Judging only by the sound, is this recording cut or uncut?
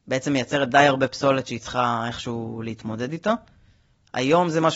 uncut